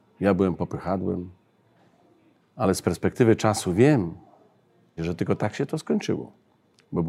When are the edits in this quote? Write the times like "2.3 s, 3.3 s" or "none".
2.3 s, 5.0 s